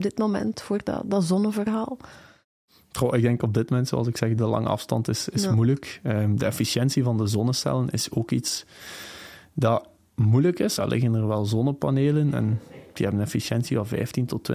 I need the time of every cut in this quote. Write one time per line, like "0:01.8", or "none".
0:04.4
0:10.8